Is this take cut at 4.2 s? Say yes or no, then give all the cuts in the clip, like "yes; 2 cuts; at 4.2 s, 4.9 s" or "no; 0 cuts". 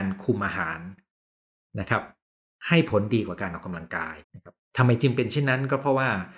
yes; 1 cut; at 4.2 s